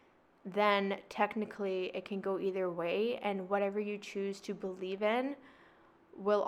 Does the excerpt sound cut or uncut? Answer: uncut